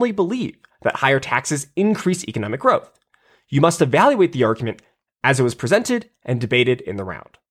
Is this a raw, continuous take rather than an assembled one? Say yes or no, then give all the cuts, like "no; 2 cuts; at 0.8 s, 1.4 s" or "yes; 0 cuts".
yes; 0 cuts